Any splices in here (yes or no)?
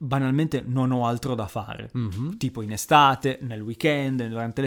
no